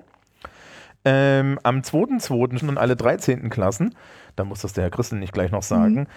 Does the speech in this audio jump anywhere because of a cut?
yes; 1 cut; at 2.6 s

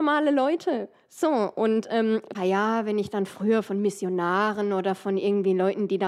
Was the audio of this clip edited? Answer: yes; 1 cut; at 2.3 s

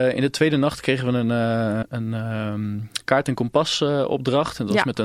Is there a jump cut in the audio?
yes; 1 cut; at 1.8 s

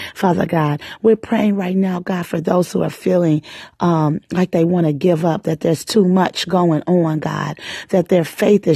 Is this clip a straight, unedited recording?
yes; 0 cuts

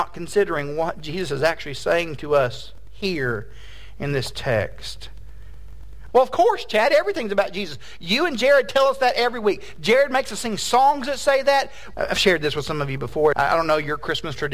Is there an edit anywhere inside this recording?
yes; 3 cuts; at 6.1 s, 11.9 s, 13.3 s

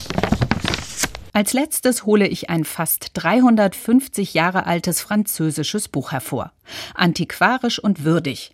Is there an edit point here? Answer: no; 0 cuts

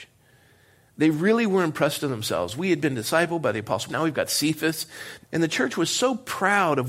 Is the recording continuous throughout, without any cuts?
no; 2 cuts; at 3.9 s, 5.2 s

